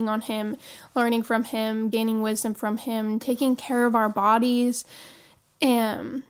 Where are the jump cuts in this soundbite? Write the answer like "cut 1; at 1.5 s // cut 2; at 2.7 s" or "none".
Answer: none